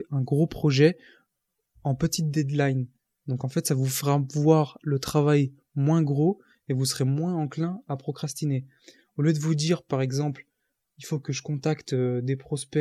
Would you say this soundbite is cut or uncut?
uncut